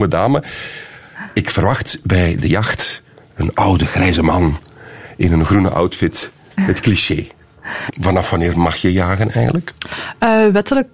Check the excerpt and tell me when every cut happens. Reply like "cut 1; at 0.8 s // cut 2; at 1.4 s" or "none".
cut 1; at 7.9 s